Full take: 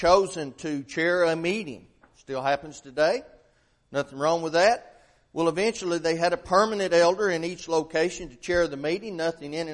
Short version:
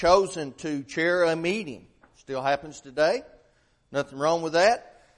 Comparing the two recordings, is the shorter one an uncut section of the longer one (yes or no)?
yes